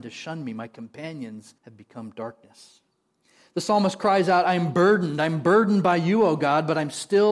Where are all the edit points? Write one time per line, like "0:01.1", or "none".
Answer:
0:01.6